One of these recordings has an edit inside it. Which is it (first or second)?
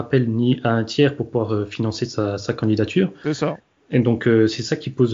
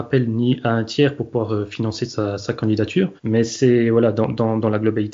second